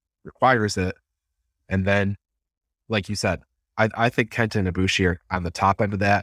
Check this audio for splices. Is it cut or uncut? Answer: uncut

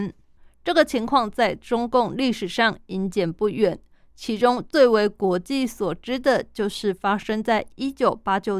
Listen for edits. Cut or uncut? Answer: uncut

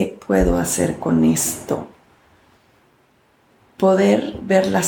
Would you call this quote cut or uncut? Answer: uncut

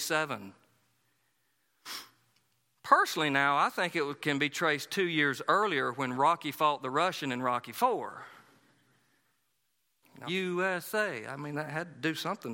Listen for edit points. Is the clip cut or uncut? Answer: cut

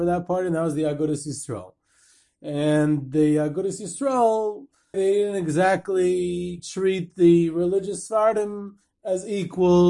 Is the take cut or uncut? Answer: cut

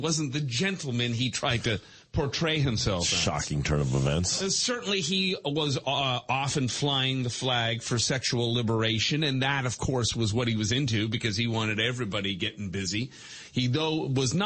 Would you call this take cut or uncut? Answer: uncut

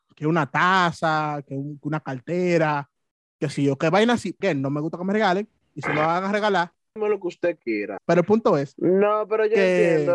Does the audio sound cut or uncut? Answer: cut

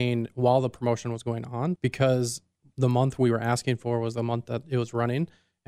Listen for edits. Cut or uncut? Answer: cut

